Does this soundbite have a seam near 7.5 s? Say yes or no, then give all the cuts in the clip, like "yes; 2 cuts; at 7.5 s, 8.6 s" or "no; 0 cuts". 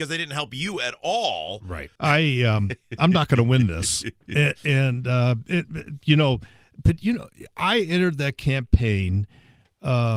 no; 1 cut; at 2.0 s